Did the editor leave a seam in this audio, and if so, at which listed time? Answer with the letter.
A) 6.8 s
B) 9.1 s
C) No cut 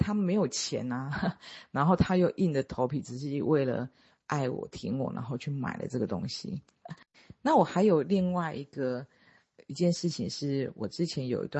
A